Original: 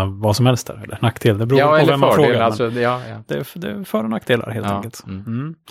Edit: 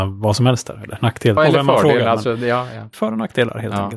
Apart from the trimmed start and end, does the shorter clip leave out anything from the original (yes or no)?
yes